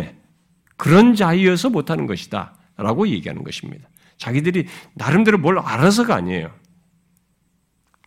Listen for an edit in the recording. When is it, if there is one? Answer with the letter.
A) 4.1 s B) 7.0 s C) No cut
C